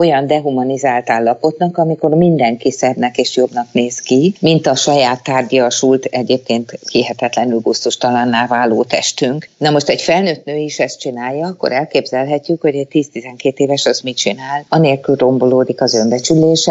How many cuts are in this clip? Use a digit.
0